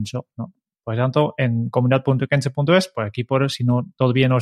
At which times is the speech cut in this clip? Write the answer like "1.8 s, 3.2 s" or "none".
none

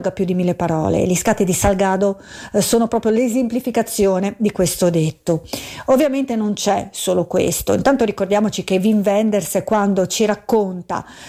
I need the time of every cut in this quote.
none

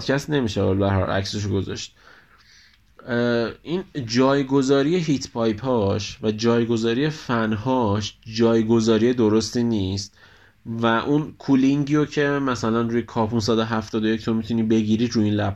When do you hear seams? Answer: none

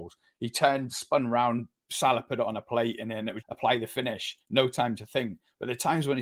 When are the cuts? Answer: 3.4 s

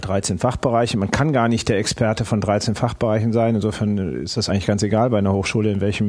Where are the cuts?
none

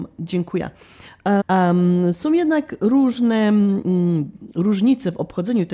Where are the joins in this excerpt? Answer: 1.4 s

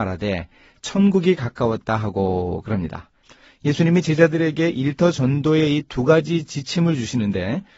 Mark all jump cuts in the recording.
3.2 s

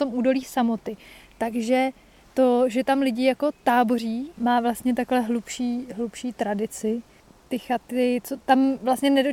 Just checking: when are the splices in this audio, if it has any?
none

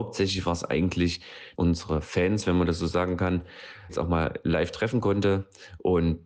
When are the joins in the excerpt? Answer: 1.5 s, 3.9 s

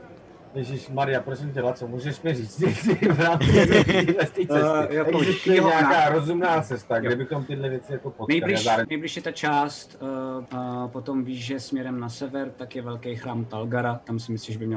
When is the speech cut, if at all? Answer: 4.9 s, 8.8 s, 10.5 s

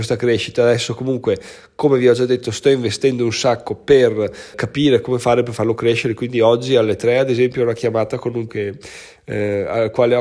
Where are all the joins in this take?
4.5 s, 8.5 s

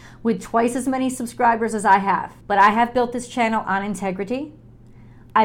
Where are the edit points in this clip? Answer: 2.4 s

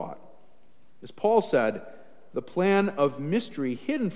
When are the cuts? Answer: none

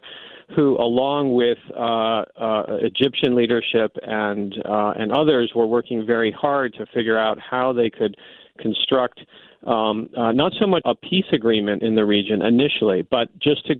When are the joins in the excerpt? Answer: 10.8 s

